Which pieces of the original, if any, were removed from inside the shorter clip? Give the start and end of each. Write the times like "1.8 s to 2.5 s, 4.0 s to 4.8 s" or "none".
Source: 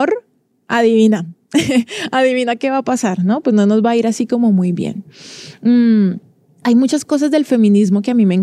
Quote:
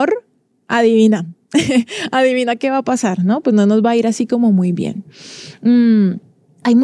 none